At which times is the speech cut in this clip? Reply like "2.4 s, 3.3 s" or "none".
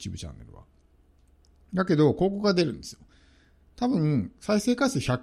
none